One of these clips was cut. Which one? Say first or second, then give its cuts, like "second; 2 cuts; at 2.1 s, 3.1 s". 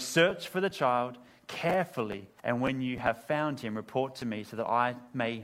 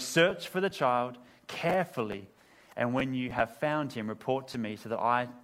first; 1 cut; at 2.4 s